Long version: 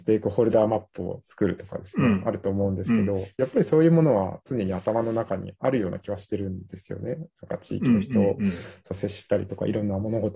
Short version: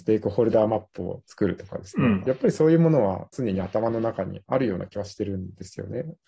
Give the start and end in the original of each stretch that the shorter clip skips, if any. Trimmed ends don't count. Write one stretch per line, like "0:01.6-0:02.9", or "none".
0:02.2-0:03.4